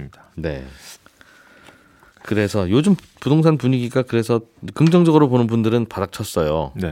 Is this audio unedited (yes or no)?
yes